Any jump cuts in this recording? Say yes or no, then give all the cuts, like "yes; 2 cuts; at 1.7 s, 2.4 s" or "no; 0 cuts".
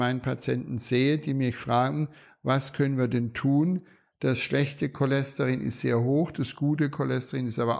no; 0 cuts